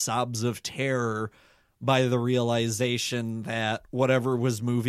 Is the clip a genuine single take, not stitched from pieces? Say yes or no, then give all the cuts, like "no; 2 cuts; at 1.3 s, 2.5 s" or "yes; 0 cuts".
yes; 0 cuts